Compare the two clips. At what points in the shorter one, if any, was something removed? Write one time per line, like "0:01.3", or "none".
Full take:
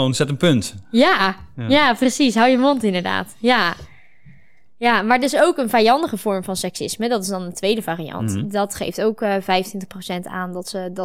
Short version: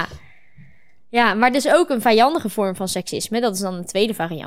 none